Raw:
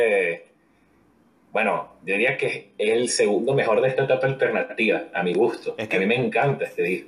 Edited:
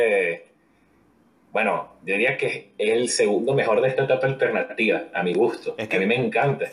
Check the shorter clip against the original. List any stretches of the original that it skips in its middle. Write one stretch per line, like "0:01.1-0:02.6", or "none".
none